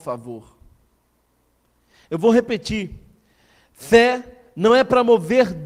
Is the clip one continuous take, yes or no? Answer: yes